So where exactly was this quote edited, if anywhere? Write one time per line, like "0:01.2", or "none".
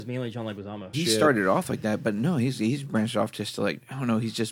0:00.9